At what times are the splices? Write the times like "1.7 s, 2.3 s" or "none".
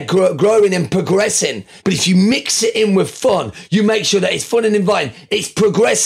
1.8 s, 3.7 s